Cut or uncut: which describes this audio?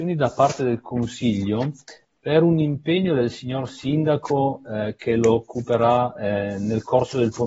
uncut